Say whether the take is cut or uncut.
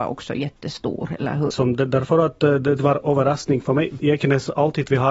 cut